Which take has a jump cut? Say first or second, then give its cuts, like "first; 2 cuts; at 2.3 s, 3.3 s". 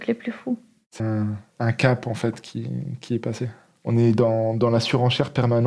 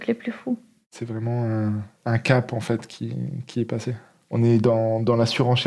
first; 1 cut; at 1.0 s